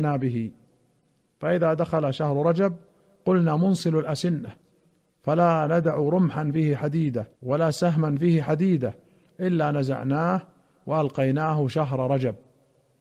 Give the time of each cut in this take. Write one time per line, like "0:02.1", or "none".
0:07.3